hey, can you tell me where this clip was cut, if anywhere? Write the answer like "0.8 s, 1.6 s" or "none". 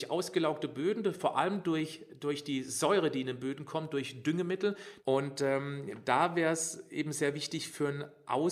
5.0 s